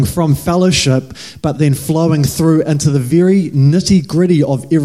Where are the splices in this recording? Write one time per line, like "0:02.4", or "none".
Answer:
none